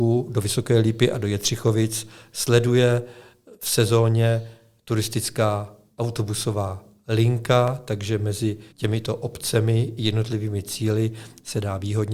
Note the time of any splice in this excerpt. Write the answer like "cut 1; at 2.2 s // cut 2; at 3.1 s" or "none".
cut 1; at 8.7 s

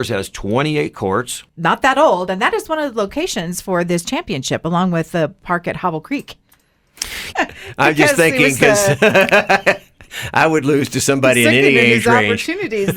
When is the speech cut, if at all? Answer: cut 1; at 1.5 s // cut 2; at 7.3 s

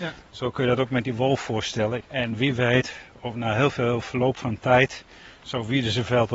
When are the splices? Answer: cut 1; at 2.0 s

